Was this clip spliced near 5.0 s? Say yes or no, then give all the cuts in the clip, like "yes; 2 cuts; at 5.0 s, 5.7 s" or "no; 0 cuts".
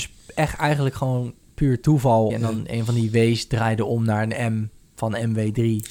no; 1 cut; at 2.3 s